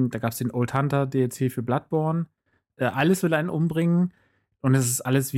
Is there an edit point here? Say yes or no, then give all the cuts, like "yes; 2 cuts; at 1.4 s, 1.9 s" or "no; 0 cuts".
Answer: yes; 1 cut; at 2.7 s